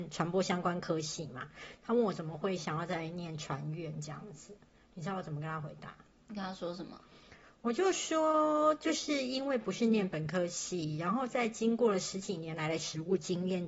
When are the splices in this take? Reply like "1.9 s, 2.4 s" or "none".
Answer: none